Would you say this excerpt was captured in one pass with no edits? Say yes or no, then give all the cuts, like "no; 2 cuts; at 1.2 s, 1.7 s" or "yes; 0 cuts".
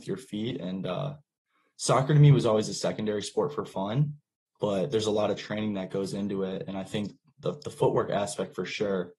yes; 0 cuts